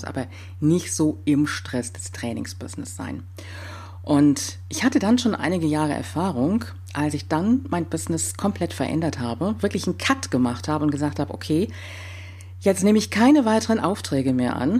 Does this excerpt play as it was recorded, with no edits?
yes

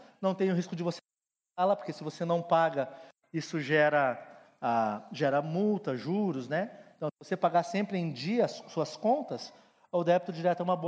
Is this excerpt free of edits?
yes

